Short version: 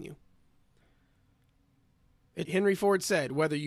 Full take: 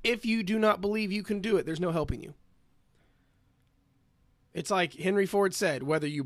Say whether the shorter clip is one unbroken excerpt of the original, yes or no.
no